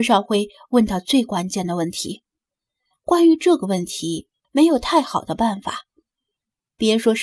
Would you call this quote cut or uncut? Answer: cut